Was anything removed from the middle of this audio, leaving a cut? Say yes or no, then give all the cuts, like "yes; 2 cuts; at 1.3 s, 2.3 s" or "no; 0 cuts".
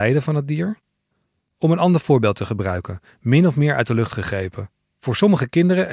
no; 0 cuts